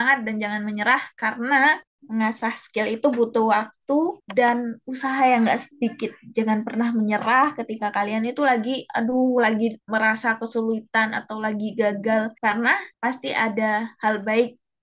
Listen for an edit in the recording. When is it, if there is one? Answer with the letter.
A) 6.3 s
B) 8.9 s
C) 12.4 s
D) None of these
C